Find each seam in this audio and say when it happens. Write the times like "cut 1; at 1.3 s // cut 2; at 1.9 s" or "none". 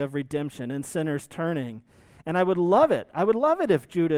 none